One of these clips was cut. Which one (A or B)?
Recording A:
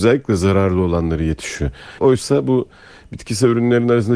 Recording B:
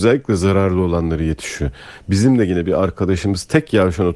A